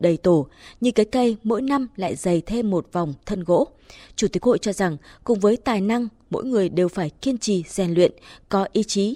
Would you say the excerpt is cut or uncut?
uncut